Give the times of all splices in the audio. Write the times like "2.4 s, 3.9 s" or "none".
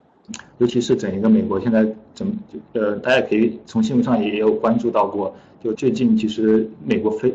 5.7 s